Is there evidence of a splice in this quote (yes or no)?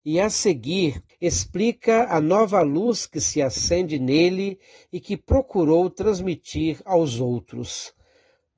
yes